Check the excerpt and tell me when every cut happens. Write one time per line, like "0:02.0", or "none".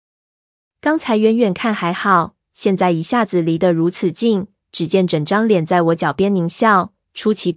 none

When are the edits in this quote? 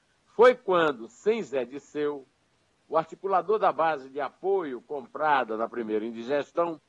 none

